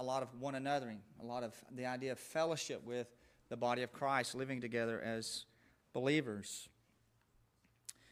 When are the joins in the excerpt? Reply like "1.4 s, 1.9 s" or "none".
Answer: none